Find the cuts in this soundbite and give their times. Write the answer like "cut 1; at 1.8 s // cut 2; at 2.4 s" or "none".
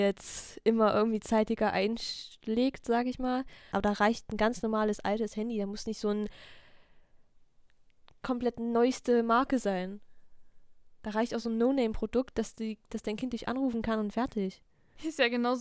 cut 1; at 3.7 s